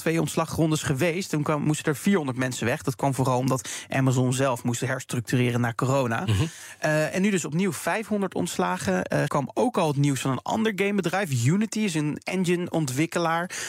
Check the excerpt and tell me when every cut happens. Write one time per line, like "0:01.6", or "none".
0:09.3